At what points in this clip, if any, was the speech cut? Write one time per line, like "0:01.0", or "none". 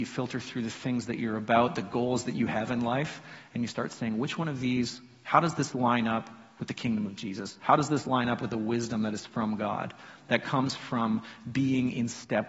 none